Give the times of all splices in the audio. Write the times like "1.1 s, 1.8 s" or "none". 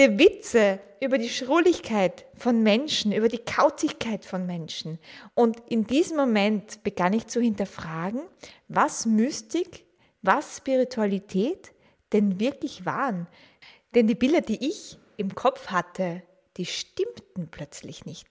5.3 s